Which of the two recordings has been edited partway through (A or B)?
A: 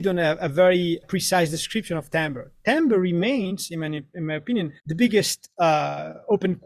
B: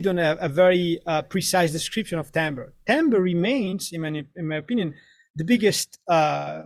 A